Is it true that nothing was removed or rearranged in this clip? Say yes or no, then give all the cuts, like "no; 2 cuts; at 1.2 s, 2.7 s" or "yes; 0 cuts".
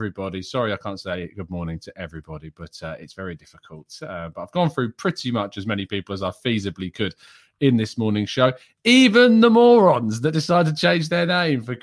yes; 0 cuts